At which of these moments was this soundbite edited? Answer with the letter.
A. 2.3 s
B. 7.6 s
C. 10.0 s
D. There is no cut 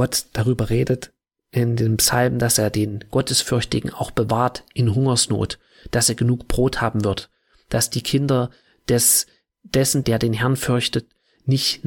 C